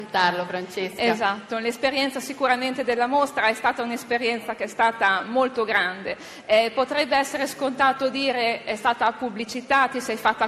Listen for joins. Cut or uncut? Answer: uncut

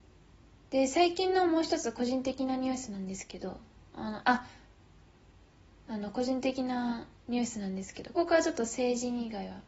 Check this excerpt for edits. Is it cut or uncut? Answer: cut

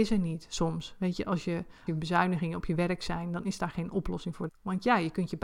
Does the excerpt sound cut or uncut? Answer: cut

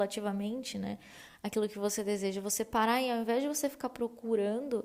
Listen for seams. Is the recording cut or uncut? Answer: uncut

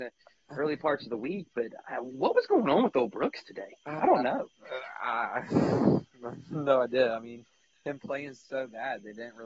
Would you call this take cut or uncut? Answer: uncut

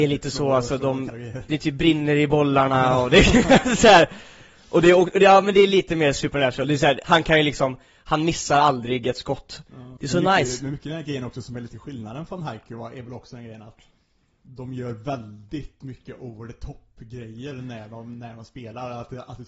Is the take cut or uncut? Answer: cut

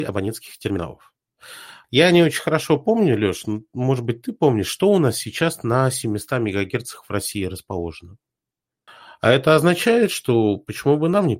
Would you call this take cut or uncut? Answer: cut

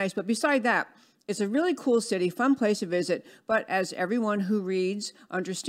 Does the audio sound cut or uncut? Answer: uncut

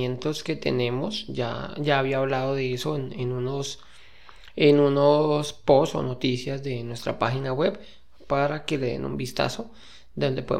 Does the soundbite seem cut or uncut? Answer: uncut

